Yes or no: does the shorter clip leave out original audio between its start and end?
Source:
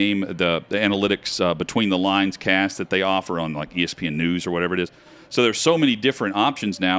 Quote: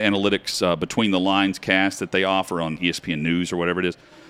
yes